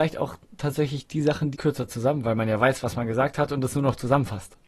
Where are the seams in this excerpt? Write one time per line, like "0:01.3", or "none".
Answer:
0:01.5